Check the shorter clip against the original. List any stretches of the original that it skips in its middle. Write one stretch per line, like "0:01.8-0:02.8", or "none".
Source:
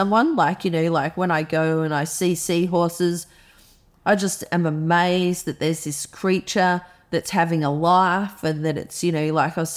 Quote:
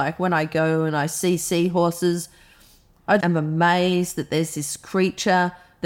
0:04.2-0:04.5